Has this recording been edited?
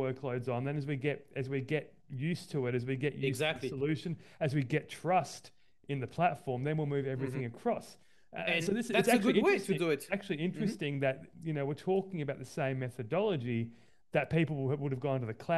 no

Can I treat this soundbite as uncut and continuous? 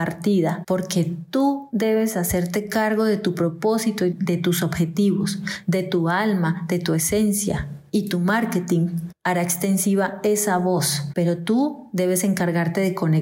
no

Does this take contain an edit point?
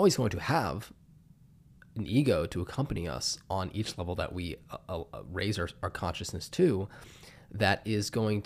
no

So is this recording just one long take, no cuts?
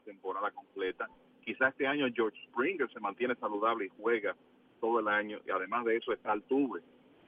yes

